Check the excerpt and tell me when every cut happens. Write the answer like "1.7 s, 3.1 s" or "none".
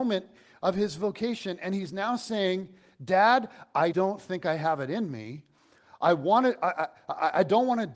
3.9 s